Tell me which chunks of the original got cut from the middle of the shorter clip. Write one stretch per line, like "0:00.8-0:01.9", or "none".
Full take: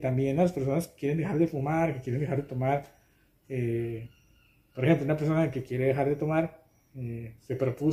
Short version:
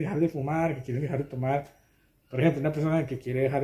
0:03.4-0:04.7